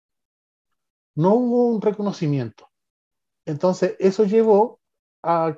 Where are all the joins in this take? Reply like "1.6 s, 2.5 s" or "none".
3.3 s

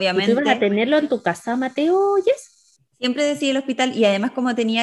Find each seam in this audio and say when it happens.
none

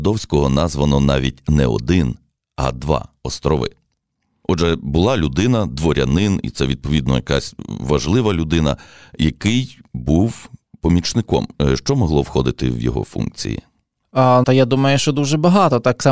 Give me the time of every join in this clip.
14.4 s

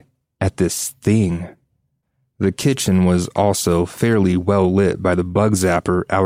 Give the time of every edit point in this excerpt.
none

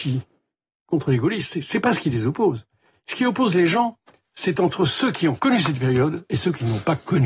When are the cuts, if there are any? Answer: none

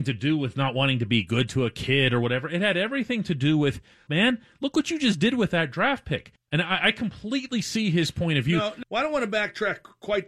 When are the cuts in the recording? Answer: 4.1 s, 6.4 s, 8.8 s

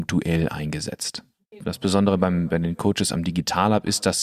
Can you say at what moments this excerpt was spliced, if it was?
1.6 s

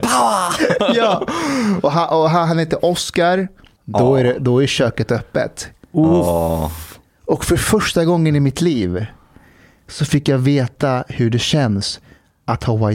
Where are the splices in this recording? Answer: 3.8 s

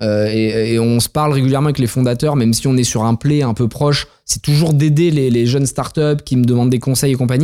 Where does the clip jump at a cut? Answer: none

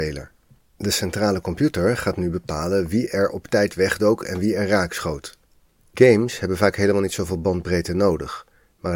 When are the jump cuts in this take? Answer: 5.9 s

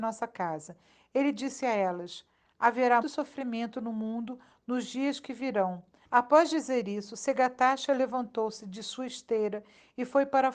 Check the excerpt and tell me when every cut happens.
3.0 s, 6.0 s

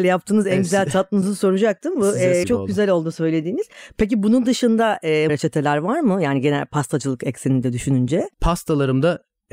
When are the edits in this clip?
2.4 s, 5.3 s, 8.3 s

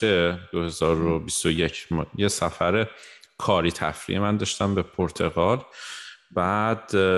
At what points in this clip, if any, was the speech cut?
none

